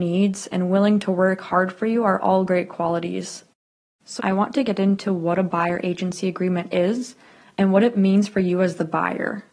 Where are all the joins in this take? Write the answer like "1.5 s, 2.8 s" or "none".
4.2 s